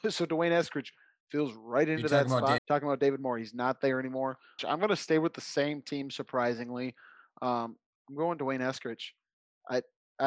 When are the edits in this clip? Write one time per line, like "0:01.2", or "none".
0:02.6
0:04.6